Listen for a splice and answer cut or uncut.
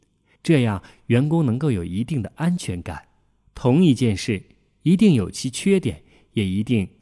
cut